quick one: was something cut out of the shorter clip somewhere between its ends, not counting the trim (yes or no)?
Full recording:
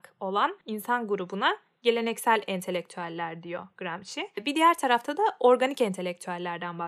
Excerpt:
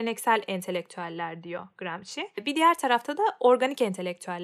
no